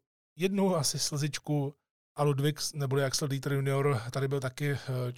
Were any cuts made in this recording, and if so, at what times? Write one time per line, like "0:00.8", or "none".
0:02.0